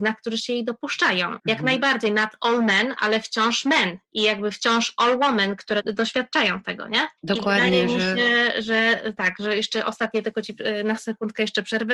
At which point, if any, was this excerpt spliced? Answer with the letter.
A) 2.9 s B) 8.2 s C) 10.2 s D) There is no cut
D